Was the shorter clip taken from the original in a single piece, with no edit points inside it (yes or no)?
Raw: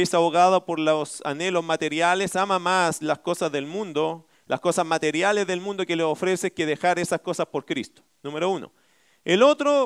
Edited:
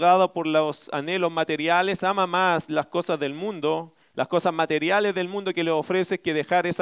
yes